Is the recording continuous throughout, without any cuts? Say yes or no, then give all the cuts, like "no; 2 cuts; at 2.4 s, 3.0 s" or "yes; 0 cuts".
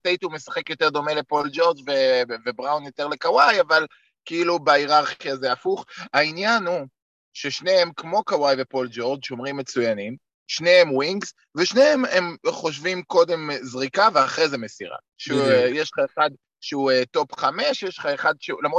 no; 1 cut; at 15.1 s